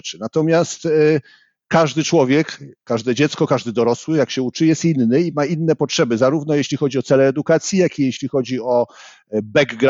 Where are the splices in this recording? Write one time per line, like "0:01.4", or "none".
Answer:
none